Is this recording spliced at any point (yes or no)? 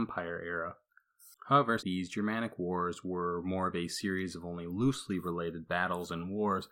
yes